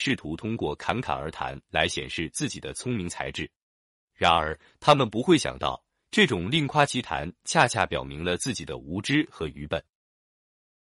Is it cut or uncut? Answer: uncut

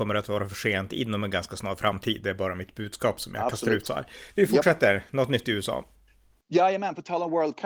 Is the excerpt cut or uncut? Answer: uncut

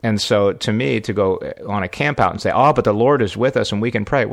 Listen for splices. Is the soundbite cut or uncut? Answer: uncut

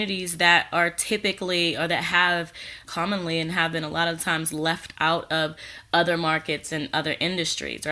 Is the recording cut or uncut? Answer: cut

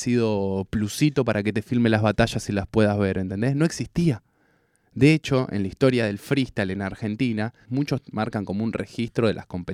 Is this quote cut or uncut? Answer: cut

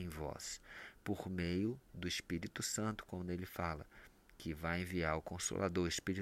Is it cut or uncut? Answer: uncut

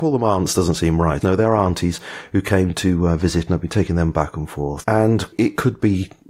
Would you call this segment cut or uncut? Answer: cut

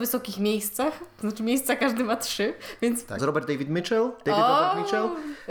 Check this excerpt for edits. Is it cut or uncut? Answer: cut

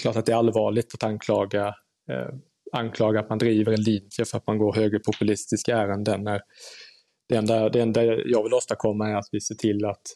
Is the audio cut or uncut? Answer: uncut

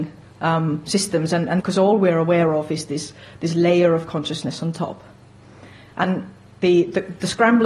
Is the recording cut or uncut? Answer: cut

